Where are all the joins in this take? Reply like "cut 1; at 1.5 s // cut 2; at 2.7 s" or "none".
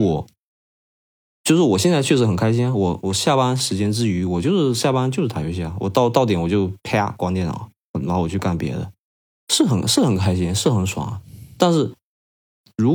none